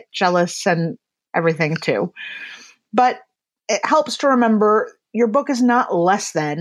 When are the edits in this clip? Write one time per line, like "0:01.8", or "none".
0:01.3